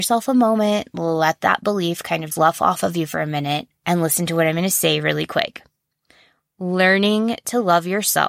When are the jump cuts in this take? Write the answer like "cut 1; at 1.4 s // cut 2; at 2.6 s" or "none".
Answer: cut 1; at 2.3 s // cut 2; at 3.8 s